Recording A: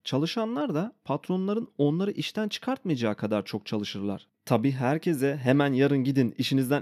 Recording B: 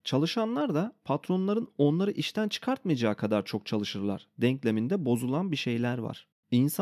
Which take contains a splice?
A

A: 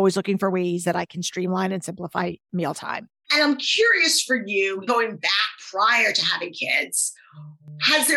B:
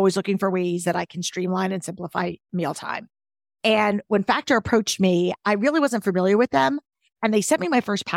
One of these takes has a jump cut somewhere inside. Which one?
A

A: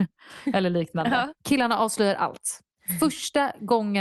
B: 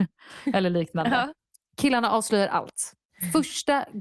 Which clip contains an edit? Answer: A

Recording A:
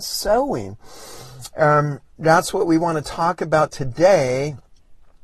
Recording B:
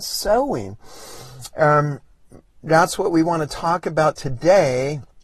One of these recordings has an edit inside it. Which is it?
A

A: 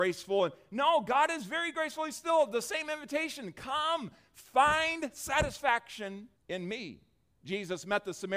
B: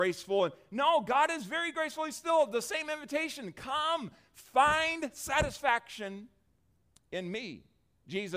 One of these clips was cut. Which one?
A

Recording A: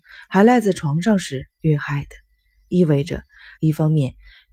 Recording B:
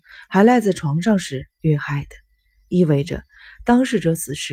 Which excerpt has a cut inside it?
A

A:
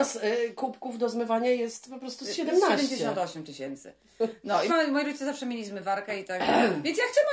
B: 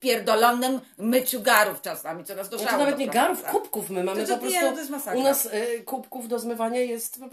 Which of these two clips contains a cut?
A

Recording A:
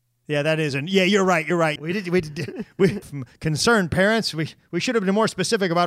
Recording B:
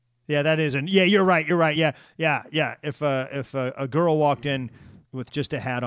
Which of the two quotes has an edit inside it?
A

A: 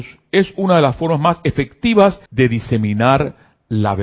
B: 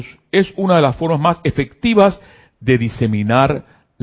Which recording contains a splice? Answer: A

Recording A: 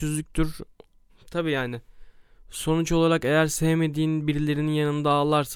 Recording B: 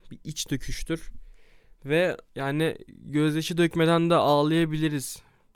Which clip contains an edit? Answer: A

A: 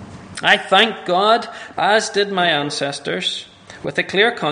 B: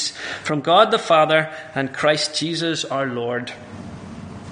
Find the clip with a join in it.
A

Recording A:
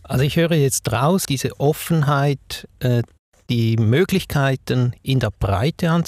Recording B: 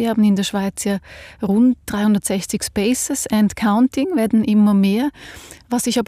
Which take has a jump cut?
A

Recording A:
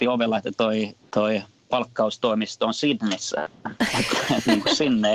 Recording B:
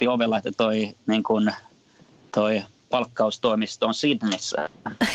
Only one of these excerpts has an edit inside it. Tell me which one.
A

